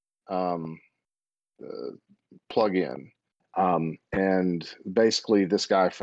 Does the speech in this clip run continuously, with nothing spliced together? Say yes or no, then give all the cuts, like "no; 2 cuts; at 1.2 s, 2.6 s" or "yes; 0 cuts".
no; 1 cut; at 3.4 s